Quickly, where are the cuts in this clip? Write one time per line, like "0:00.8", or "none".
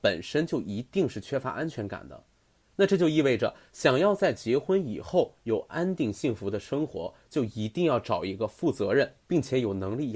none